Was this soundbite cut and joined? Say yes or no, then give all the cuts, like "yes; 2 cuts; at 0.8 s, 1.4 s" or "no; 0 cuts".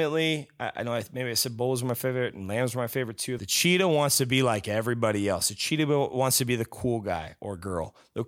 yes; 1 cut; at 3.4 s